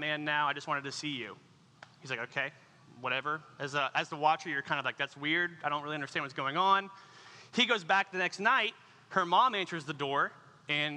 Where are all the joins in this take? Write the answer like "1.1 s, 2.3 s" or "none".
none